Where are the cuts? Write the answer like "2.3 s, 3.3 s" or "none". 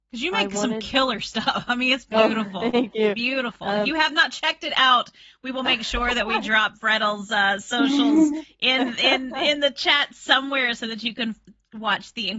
none